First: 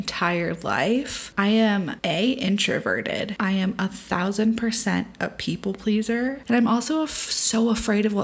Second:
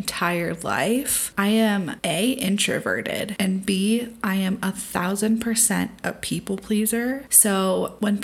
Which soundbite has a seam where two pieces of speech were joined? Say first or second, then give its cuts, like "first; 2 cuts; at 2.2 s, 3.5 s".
first; 2 cuts; at 3.4 s, 6.4 s